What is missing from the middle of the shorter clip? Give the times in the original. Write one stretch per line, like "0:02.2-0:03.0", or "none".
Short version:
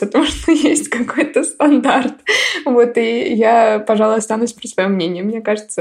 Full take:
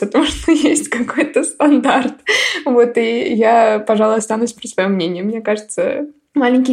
none